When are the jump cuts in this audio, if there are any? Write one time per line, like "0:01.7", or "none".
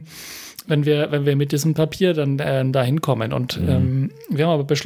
none

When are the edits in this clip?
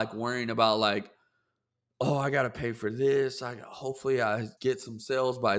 0:04.6

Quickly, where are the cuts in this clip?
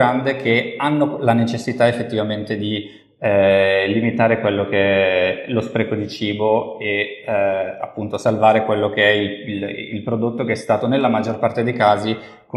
none

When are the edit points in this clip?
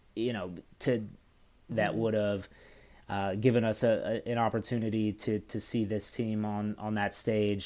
0:01.7

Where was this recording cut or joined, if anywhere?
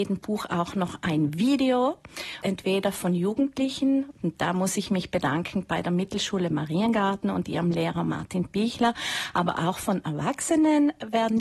0:02.4

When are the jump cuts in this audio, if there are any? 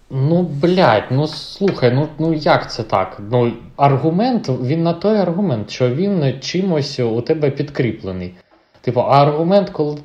none

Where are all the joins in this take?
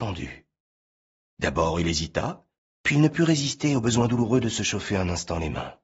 0:02.7

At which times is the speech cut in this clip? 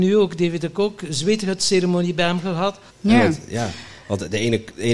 0:02.9

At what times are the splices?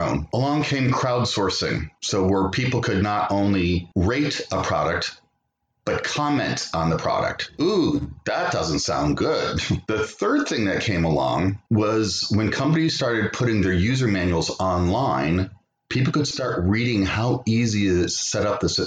none

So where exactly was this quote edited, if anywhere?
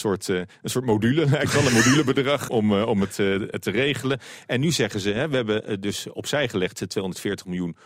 0:02.5

